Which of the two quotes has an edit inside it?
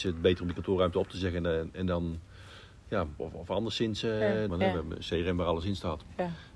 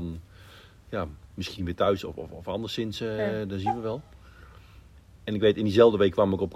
first; 2 cuts; at 3.2 s, 4.5 s

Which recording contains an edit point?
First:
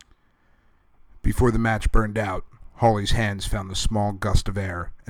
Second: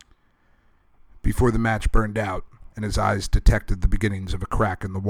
second; 1 cut; at 2.7 s

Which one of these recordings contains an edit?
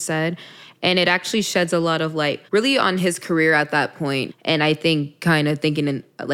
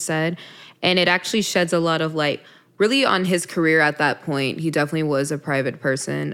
first; 2 cuts; at 2.5 s, 4.3 s

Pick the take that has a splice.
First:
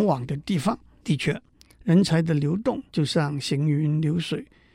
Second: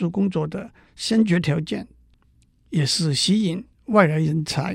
first; 2 cuts; at 1.0 s, 2.9 s

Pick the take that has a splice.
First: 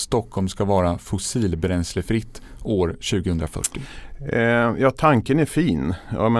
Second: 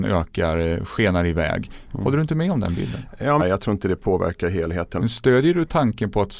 second; 2 cuts; at 3.4 s, 5.0 s

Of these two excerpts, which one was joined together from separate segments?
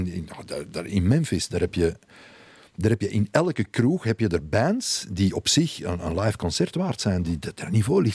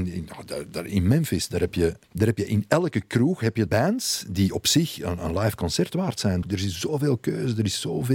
second; 3 cuts; at 2.0 s, 3.7 s, 6.4 s

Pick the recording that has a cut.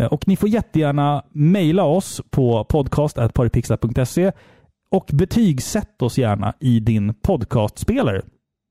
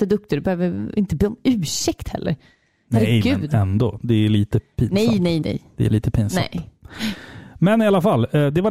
second; 1 cut; at 5.4 s

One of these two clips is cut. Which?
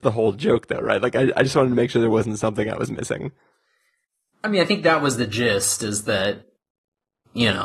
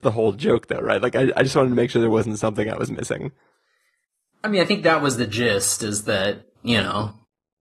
second; 1 cut; at 6.6 s

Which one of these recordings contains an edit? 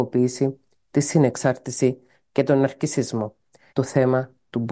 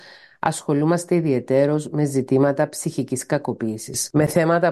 first; 1 cut; at 3.7 s

